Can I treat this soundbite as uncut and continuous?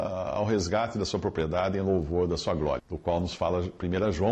no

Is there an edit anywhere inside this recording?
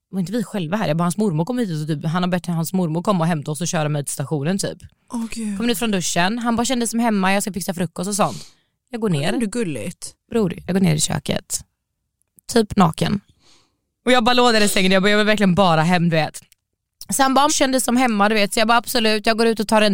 yes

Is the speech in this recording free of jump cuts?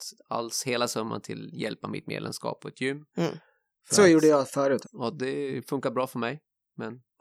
no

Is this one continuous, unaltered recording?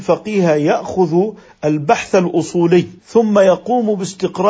no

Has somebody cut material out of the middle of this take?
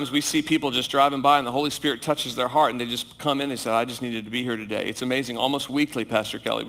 no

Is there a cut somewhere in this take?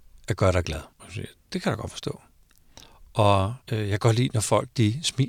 yes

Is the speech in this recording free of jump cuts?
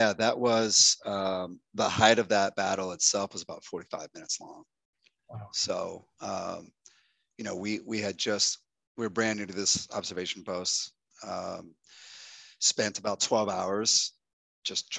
yes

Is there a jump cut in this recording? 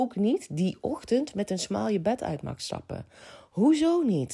no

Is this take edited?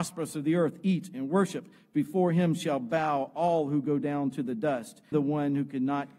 yes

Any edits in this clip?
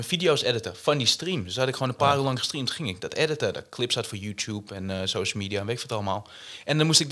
no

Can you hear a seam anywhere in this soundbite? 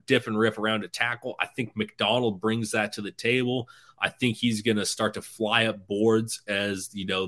no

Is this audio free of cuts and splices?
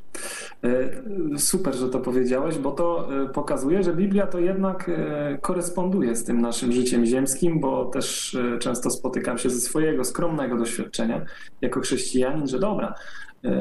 yes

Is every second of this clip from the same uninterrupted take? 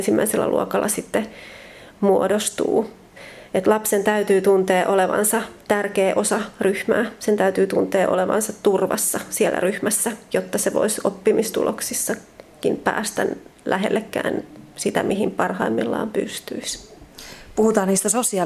yes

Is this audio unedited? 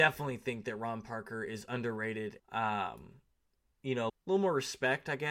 no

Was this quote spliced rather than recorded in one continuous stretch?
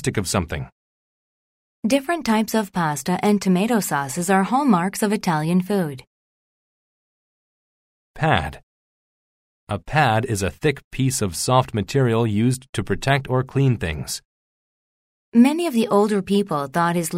yes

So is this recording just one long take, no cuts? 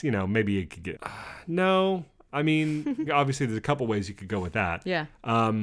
no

